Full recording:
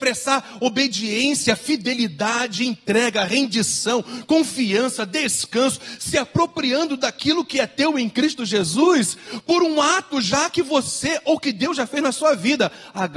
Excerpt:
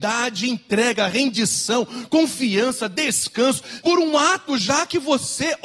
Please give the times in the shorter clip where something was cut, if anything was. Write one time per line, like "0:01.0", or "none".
0:03.8